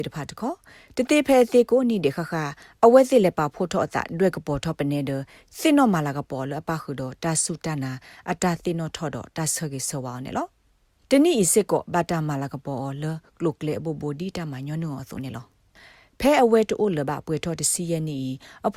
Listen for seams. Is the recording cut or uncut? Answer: uncut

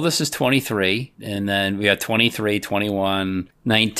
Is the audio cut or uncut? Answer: uncut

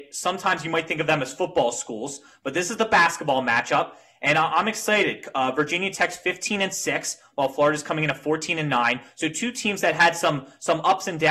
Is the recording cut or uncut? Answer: uncut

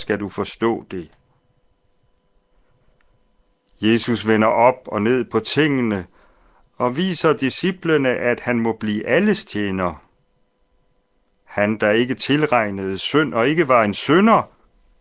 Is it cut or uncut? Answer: uncut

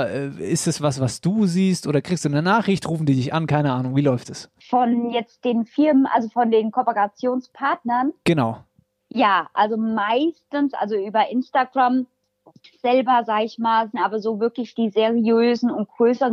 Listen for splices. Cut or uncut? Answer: cut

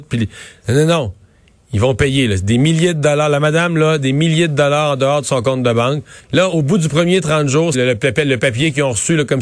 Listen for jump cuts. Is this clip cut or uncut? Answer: cut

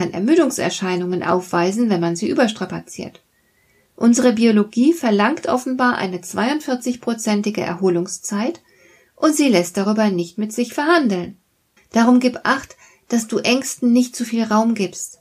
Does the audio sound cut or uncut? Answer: cut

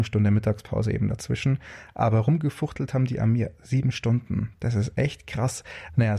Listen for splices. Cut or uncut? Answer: uncut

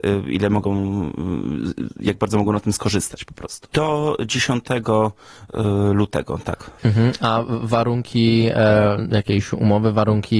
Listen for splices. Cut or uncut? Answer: cut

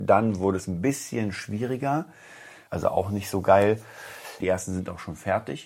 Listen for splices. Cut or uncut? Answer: cut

